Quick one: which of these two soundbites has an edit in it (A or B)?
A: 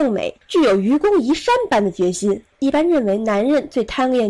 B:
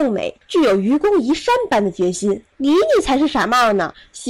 B